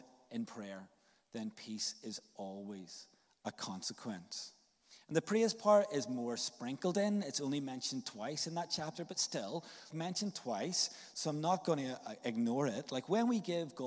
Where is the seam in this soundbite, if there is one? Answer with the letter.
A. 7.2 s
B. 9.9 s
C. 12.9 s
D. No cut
B